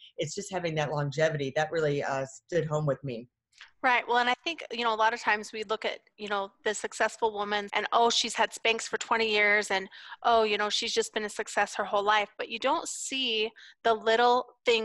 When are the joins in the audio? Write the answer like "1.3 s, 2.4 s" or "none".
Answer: 7.7 s